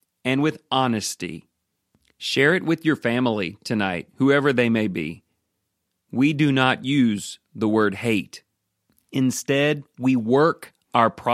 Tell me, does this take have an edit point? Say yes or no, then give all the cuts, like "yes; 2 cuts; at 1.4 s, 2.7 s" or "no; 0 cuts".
no; 0 cuts